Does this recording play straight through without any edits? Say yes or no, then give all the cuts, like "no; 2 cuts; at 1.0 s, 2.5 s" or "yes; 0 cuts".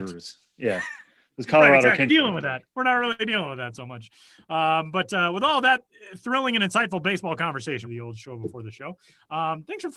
no; 2 cuts; at 2.1 s, 7.8 s